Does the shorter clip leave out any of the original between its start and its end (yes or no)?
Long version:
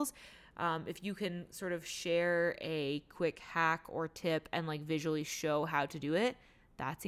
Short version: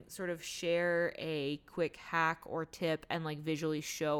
no